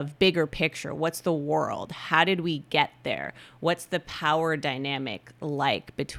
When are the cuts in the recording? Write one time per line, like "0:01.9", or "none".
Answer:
none